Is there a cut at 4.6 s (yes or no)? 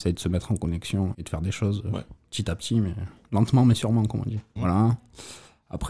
yes